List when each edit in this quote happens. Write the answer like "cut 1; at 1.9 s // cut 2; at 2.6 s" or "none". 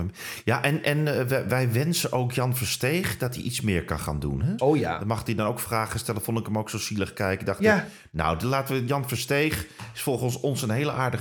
cut 1; at 4.6 s